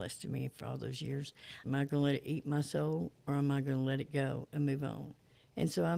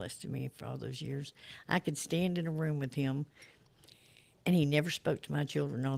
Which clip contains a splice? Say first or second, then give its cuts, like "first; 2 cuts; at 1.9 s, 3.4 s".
first; 1 cut; at 1.6 s